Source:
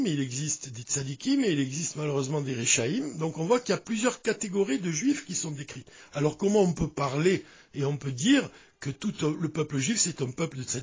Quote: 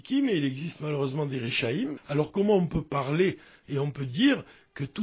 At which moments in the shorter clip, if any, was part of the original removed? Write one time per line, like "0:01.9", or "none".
0:02.0

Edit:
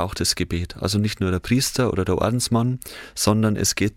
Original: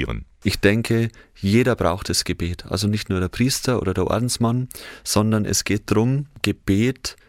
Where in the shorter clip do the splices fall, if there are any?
none

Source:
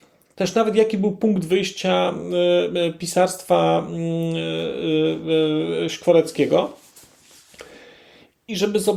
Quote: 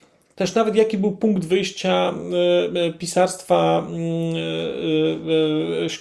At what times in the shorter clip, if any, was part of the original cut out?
none

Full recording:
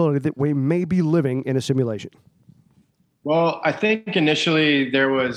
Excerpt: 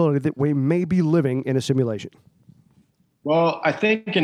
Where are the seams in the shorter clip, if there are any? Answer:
none

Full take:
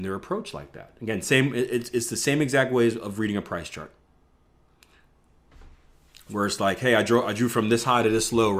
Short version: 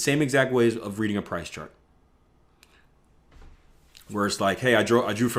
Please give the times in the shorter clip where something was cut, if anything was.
none

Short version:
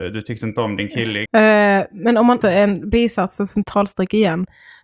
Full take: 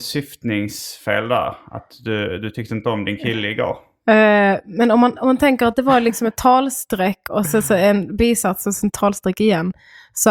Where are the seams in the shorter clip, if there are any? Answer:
0:01.3
0:02.4

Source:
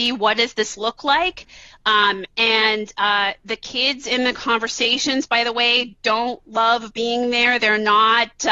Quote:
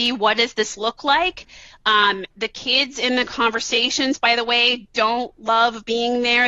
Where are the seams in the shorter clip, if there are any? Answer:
0:02.3

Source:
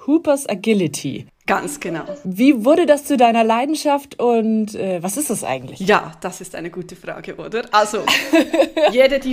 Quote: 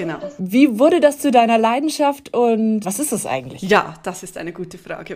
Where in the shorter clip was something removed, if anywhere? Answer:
0:02.8

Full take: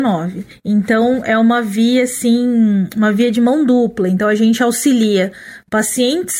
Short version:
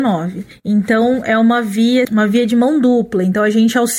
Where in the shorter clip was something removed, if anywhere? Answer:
0:02.0

